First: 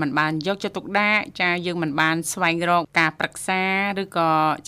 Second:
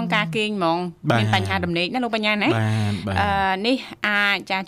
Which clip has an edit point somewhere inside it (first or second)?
first